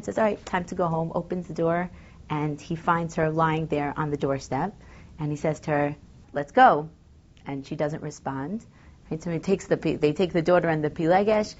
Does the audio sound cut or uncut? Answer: cut